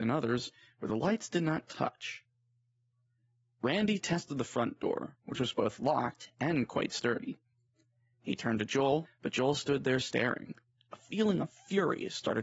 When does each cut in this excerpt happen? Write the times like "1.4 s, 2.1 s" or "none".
9.0 s, 10.7 s

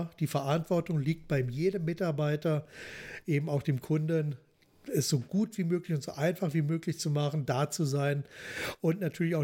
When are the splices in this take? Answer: none

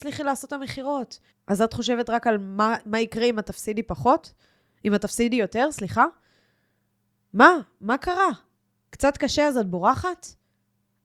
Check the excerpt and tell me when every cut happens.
1.3 s

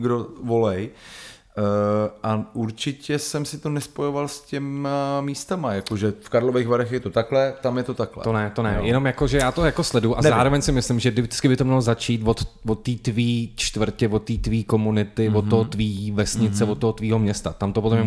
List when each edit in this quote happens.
none

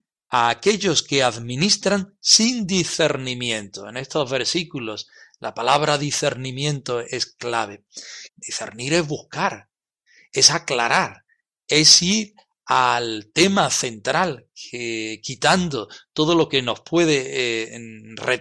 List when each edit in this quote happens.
8.3 s

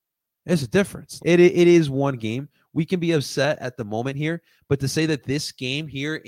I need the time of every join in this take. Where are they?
1.2 s

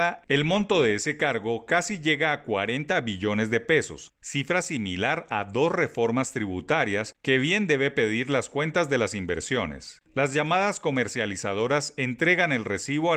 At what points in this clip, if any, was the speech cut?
10.1 s

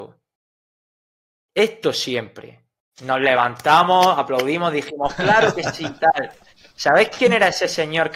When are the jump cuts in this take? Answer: none

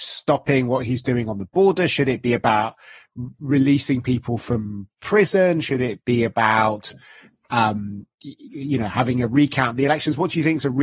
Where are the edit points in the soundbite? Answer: none

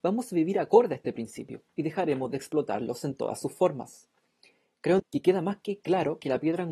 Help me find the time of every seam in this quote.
5.0 s

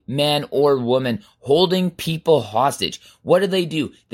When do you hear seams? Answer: none

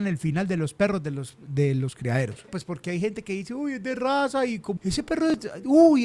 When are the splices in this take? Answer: 2.5 s, 4.8 s

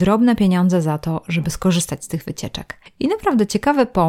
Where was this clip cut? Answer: none

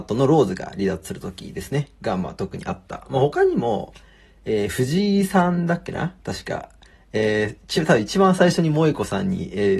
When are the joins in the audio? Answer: none

